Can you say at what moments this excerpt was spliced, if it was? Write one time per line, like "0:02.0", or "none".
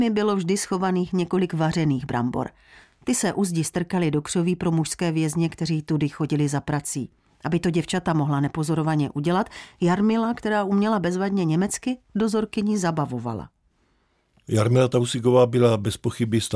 none